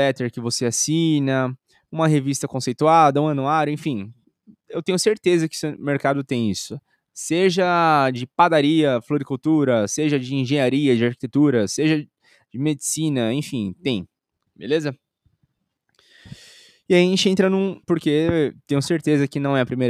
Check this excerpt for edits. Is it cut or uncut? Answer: cut